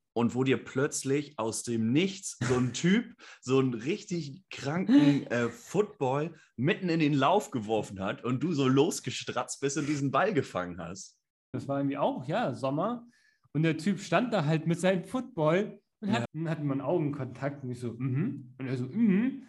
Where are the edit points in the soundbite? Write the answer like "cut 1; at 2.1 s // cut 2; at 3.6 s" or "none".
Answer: cut 1; at 11.5 s // cut 2; at 16.2 s